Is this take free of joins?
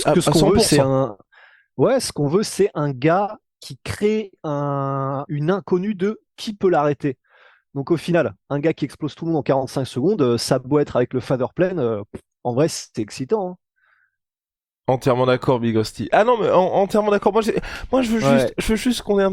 no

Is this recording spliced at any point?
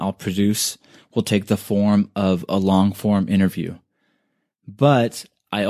no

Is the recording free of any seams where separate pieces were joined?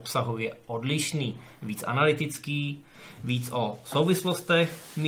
yes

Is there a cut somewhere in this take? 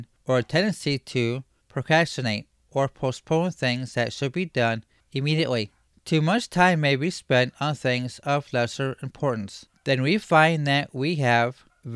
no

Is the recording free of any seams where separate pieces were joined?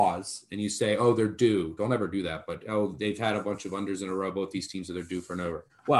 yes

